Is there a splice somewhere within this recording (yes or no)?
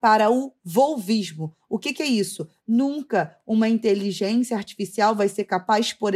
yes